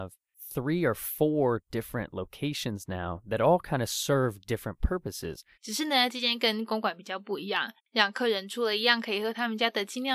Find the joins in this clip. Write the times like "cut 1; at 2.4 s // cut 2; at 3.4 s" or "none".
cut 1; at 5.6 s // cut 2; at 7.8 s